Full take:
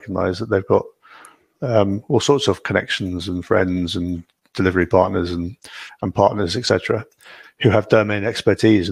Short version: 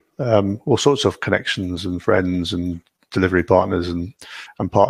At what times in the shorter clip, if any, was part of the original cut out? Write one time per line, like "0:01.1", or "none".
none